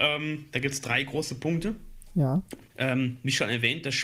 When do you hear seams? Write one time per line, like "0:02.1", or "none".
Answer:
0:02.7